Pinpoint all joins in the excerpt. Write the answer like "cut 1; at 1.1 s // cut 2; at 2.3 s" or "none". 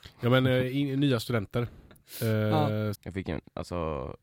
cut 1; at 2.9 s